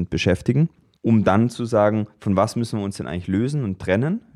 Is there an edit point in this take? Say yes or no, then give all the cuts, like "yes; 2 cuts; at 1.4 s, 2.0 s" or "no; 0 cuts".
no; 0 cuts